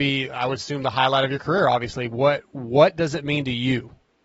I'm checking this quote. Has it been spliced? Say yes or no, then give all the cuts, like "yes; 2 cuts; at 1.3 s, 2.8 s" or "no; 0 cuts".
no; 0 cuts